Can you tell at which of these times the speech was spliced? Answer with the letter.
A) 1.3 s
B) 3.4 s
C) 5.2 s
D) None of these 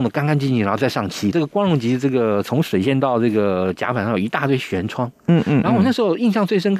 A